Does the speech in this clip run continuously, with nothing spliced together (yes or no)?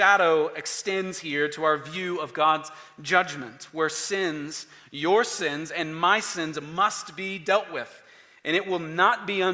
yes